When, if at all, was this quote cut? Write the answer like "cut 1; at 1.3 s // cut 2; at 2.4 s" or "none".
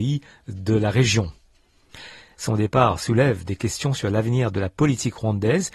cut 1; at 2.4 s